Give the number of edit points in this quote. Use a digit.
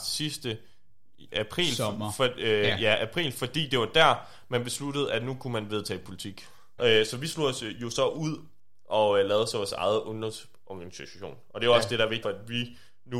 2